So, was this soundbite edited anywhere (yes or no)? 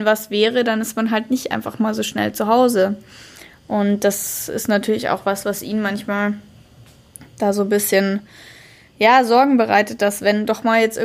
no